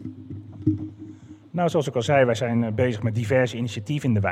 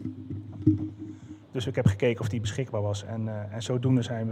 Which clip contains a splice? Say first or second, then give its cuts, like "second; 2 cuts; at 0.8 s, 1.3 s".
second; 1 cut; at 1.4 s